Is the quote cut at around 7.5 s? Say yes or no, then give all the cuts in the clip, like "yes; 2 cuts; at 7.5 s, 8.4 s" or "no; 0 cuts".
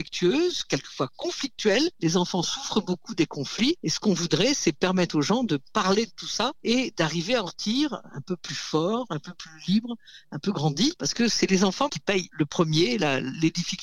yes; 1 cut; at 7.5 s